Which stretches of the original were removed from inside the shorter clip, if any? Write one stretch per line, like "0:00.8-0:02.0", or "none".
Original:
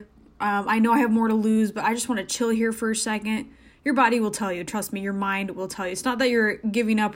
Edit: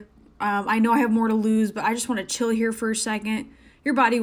none